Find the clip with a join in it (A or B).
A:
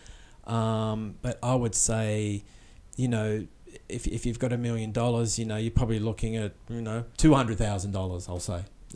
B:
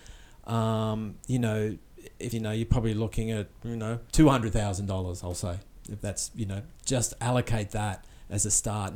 B